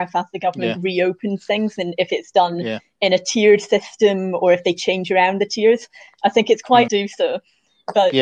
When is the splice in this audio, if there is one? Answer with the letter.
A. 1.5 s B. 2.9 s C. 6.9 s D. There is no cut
C